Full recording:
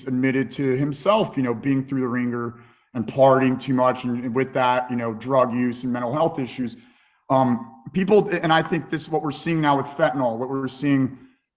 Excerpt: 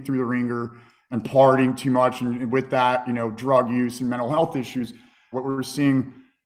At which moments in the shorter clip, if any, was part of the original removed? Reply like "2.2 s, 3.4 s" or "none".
5.3 s